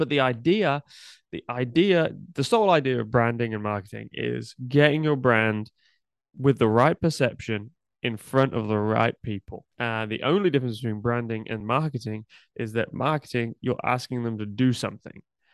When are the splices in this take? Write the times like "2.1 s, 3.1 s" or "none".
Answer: 9.7 s, 11.6 s